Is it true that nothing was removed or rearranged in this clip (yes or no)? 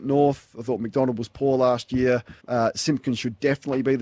no